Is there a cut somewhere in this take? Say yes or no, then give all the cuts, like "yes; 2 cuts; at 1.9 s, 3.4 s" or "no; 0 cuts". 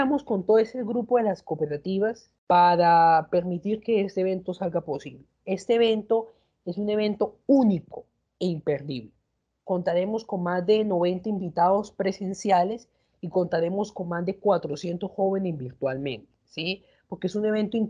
no; 0 cuts